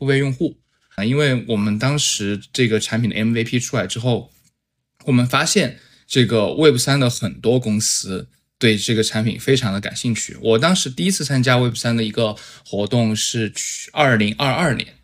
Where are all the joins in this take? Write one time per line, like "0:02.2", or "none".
0:01.0